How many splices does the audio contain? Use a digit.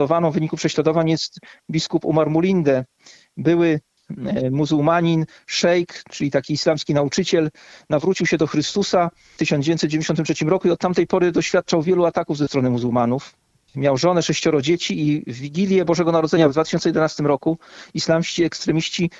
0